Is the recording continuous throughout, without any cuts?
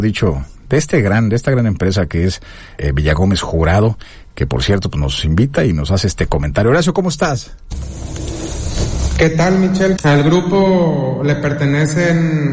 no; 2 cuts; at 2.8 s, 10.0 s

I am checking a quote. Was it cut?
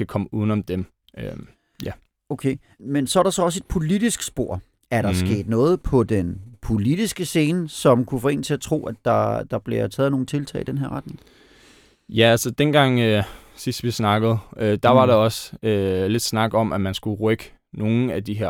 yes; 1 cut; at 2.8 s

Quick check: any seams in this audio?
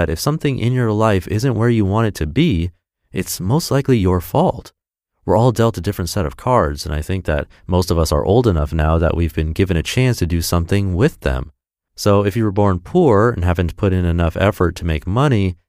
no; 0 cuts

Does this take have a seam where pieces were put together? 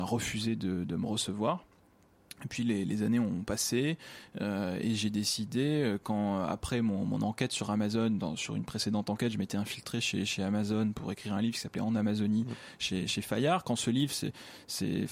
no; 0 cuts

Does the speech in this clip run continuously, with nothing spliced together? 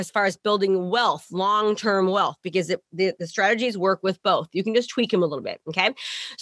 yes; 0 cuts

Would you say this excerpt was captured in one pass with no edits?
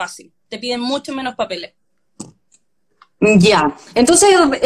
yes; 0 cuts

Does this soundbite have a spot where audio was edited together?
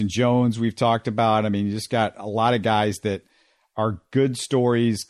no; 0 cuts

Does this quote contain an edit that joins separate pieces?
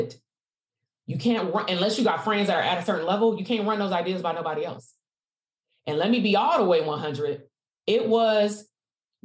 yes; 1 cut; at 7.7 s

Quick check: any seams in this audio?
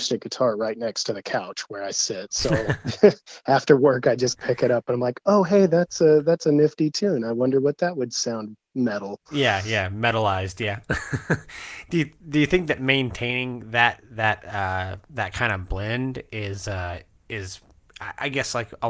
no; 0 cuts

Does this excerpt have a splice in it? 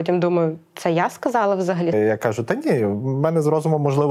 yes; 1 cut; at 1.9 s

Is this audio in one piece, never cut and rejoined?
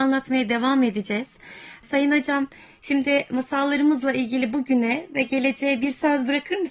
yes; 0 cuts

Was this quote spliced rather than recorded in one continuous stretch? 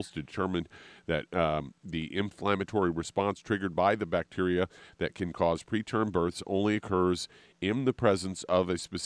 no; 0 cuts

